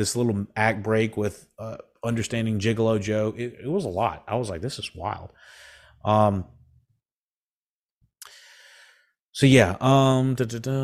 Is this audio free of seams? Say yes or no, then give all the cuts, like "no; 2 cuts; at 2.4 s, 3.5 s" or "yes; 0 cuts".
yes; 0 cuts